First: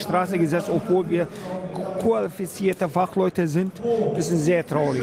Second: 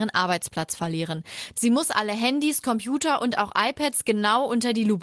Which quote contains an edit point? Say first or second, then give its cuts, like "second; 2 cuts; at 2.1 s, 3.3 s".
second; 1 cut; at 1.5 s